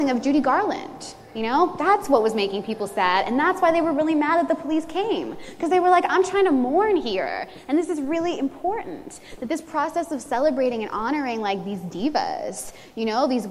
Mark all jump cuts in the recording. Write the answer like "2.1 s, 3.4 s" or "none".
none